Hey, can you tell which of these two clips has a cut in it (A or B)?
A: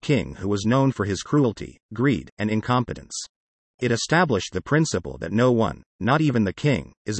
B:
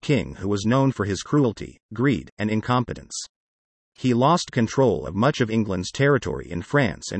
A